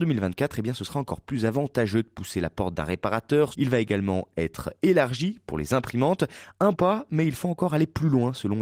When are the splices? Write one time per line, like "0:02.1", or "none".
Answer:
0:03.5
0:06.7

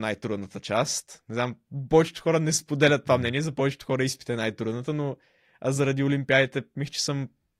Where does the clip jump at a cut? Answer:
none

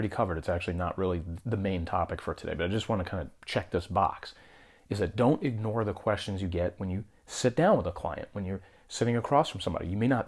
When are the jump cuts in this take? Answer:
none

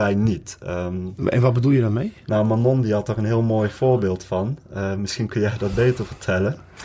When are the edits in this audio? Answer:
none

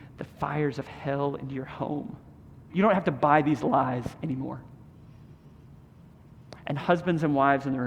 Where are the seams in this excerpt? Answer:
0:02.7

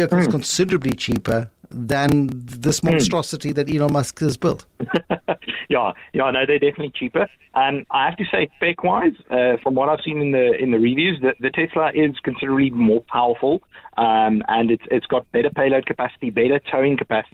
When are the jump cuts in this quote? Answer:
0:04.7

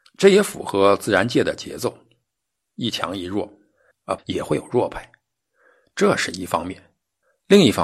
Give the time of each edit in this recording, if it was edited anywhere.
0:04.2

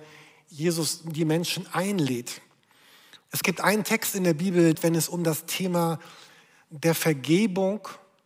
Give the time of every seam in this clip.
0:03.3
0:04.7

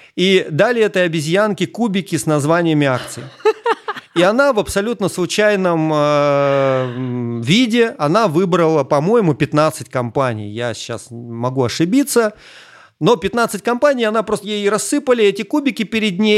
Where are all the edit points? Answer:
0:14.4

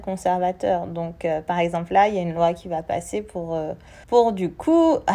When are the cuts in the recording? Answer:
0:04.0

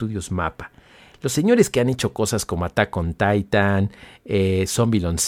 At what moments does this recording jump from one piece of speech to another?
none

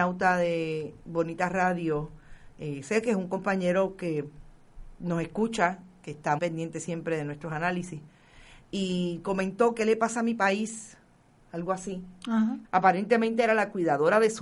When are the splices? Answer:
0:06.4
0:12.6

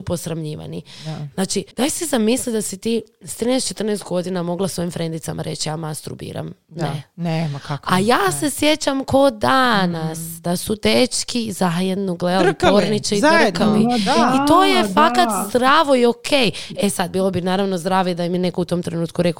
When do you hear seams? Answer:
0:01.7

